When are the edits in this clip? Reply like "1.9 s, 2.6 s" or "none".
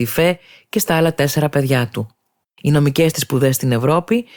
2.4 s